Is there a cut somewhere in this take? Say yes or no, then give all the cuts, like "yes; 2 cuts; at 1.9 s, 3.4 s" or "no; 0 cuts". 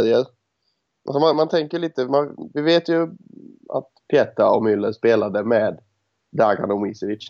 yes; 1 cut; at 1.3 s